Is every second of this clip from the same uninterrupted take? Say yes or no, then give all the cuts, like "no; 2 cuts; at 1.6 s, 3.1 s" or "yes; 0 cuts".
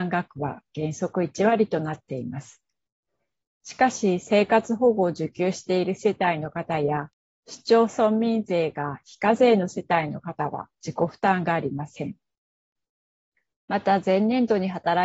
yes; 0 cuts